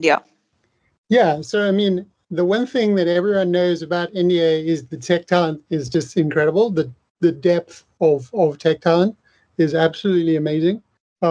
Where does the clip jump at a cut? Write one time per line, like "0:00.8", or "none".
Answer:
none

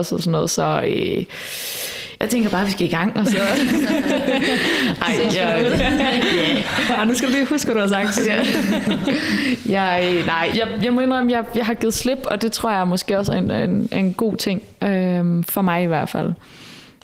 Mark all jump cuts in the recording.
0:10.5

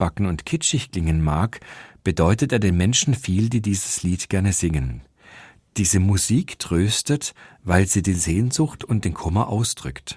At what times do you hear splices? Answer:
none

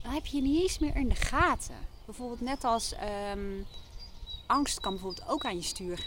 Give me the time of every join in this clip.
none

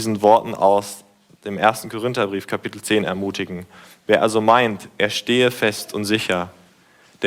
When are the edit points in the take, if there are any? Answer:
none

